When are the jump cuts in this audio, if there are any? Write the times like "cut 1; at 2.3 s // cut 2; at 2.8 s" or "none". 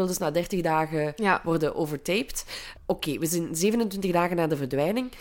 cut 1; at 2.8 s